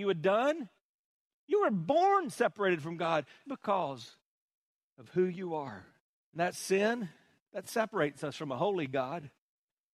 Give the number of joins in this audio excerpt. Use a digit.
2